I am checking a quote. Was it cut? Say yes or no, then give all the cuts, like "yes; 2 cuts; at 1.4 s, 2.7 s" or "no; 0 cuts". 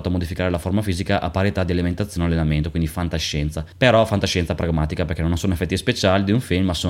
yes; 1 cut; at 3.7 s